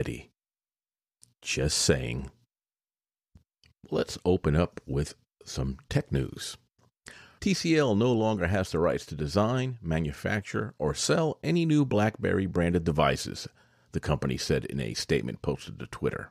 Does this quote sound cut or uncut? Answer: cut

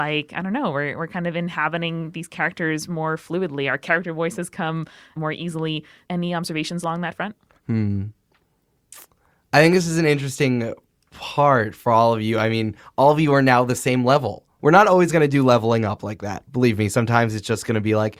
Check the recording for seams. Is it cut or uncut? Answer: cut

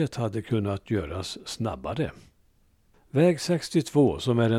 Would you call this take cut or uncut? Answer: cut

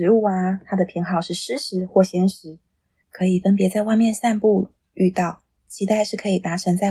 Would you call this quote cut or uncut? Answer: cut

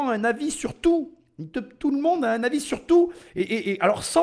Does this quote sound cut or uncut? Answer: uncut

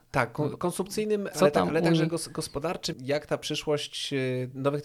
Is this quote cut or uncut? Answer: cut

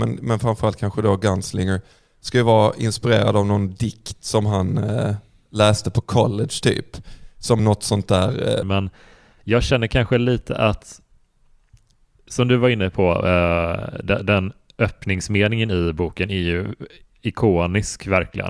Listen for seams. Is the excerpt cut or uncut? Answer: cut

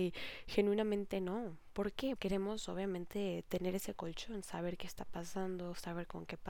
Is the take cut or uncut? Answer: cut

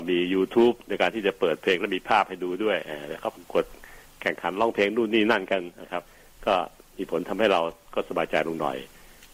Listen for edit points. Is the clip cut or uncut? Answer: uncut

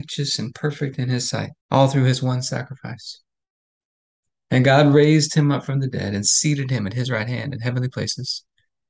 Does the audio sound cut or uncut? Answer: cut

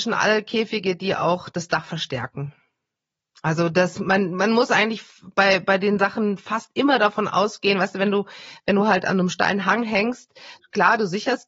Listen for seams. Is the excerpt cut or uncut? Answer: uncut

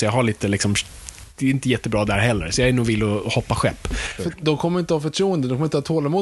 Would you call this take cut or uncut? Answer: cut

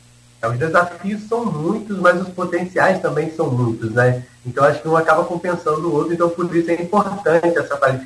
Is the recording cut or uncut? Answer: uncut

